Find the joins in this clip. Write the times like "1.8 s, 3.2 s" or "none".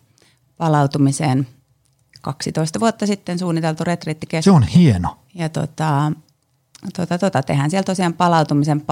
5.2 s